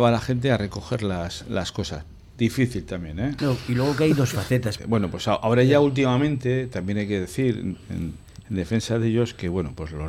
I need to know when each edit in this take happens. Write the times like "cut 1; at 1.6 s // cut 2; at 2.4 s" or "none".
cut 1; at 3.4 s // cut 2; at 4.8 s